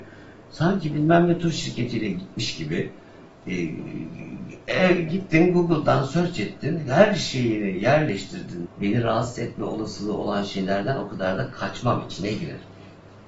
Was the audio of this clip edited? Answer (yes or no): yes